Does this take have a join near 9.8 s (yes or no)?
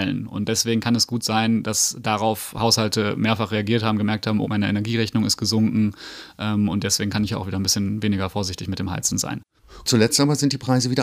no